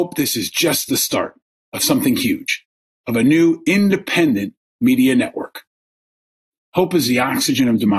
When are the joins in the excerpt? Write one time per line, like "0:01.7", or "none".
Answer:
none